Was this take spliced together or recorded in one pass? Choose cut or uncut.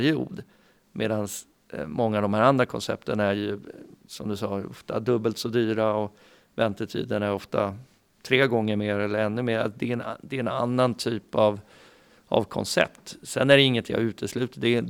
uncut